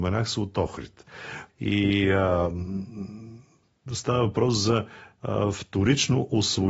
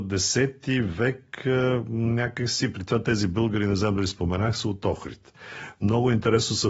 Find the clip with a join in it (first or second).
first